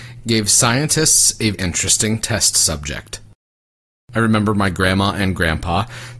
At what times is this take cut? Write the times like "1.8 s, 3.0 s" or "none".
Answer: 1.5 s

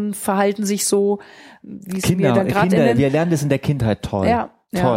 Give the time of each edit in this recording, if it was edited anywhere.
none

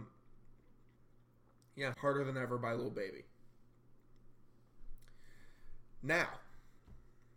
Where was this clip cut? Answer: 1.9 s

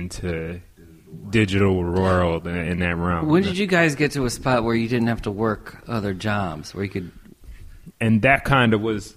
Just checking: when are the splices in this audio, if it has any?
7.9 s

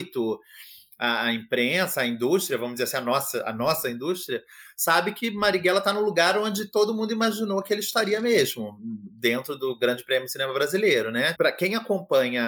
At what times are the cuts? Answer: 11.3 s

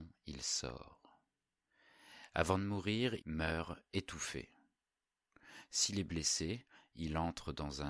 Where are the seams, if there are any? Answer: 3.2 s

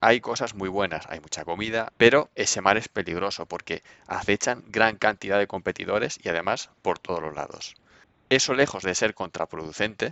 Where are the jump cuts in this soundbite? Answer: 1.9 s

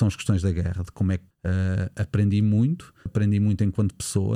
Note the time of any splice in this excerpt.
1.3 s, 3.1 s

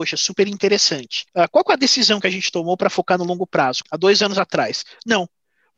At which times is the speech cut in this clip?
1.3 s, 3.8 s

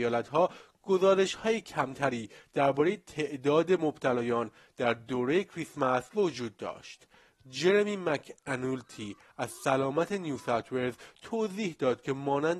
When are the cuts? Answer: 6.1 s

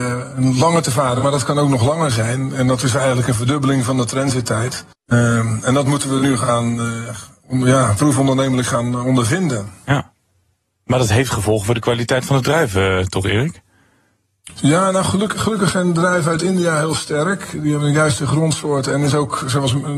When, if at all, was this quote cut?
none

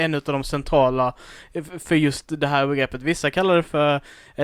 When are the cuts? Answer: none

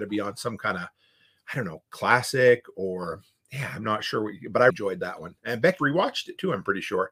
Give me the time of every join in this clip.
4.7 s, 5.8 s

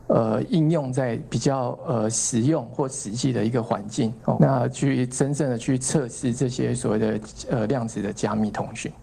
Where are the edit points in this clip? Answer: 4.4 s

